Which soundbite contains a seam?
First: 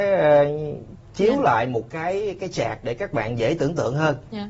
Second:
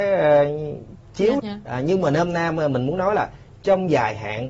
second; 1 cut; at 1.4 s

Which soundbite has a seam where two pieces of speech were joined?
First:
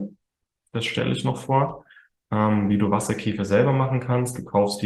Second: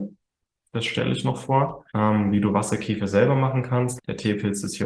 second; 2 cuts; at 1.9 s, 4.0 s

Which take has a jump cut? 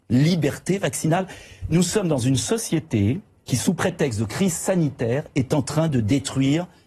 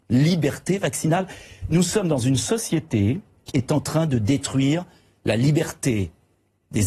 second; 1 cut; at 3.5 s

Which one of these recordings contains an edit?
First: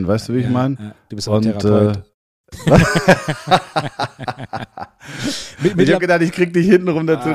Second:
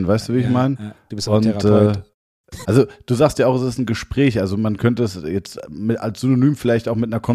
second; 1 cut; at 2.6 s

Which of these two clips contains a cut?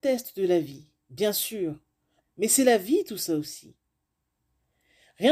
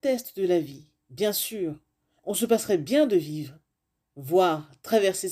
first; 1 cut; at 2.2 s

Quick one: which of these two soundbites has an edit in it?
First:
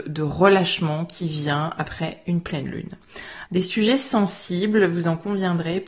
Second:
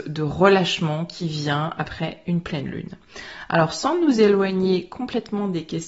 first; 1 cut; at 3.5 s

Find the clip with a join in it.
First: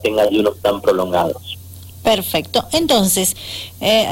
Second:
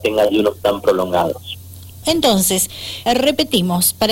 second; 2 cuts; at 2.0 s, 3.1 s

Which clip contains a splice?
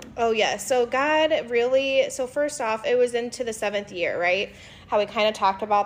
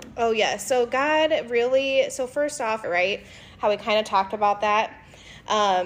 second; 1 cut; at 2.8 s

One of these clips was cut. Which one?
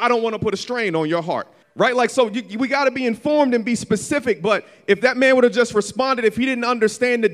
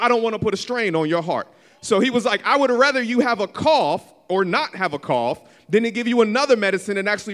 first; 1 cut; at 1.6 s

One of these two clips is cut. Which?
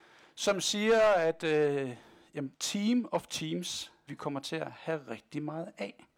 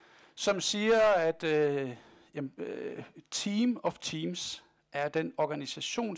first; 2 cuts; at 2.5 s, 4.1 s

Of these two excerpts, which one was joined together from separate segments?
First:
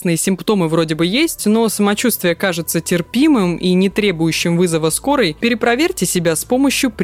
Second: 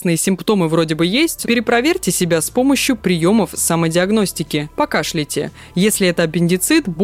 second; 1 cut; at 1.4 s

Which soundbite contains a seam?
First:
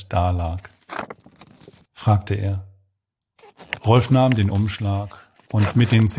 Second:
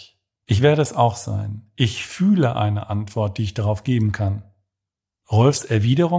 first; 1 cut; at 1.8 s

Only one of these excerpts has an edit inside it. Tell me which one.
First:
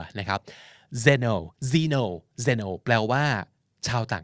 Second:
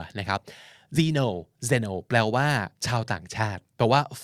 second; 2 cuts; at 1.0 s, 2.8 s

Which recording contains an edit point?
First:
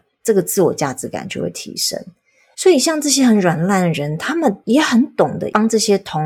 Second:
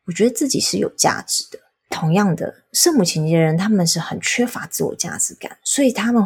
first; 1 cut; at 2.5 s

